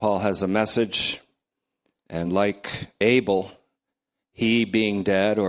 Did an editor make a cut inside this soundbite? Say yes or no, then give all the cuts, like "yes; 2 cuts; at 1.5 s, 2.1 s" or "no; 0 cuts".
no; 0 cuts